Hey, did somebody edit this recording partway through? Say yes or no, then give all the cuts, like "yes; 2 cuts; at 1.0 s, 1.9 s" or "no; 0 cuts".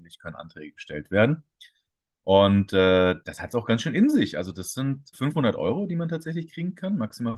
yes; 1 cut; at 5.1 s